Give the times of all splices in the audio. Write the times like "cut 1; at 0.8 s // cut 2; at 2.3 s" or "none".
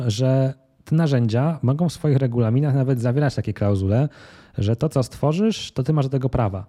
none